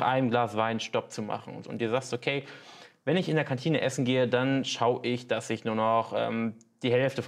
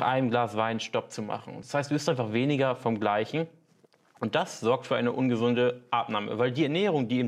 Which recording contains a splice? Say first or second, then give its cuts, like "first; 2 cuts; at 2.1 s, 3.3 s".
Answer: first; 1 cut; at 1.6 s